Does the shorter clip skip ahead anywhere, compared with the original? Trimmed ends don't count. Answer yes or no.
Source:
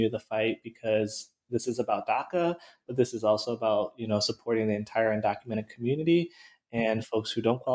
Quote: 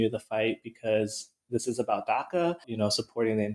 yes